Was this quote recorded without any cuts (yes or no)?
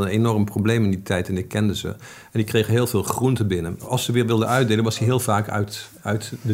yes